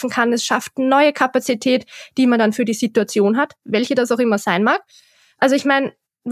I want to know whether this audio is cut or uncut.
uncut